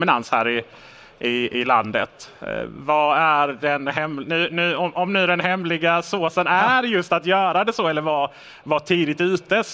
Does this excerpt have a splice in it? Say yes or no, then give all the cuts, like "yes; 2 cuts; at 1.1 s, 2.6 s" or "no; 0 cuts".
no; 0 cuts